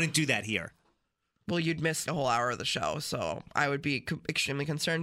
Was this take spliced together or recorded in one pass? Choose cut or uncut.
cut